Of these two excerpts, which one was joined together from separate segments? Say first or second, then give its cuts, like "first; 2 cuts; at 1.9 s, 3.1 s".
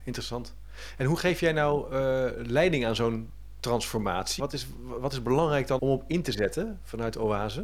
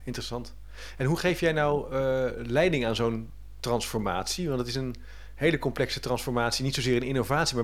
first; 2 cuts; at 4.4 s, 5.8 s